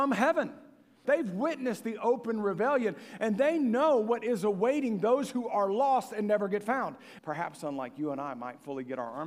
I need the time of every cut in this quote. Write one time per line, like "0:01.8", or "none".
0:01.0
0:07.2

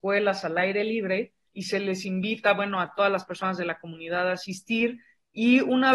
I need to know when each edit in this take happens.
none

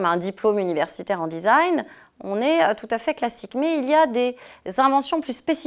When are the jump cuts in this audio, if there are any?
none

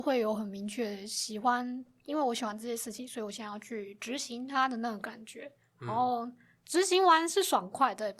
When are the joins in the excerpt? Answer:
none

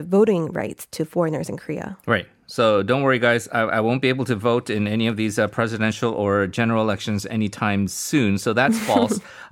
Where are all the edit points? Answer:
none

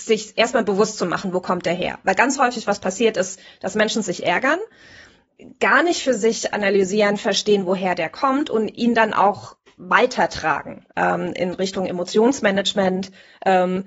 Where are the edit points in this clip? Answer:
0:10.9

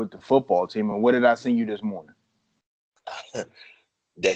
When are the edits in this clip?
none

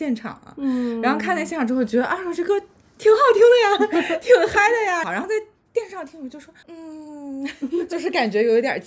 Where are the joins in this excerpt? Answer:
0:05.0
0:06.6

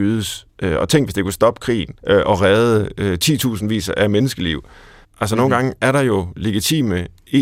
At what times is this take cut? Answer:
0:02.0
0:05.0

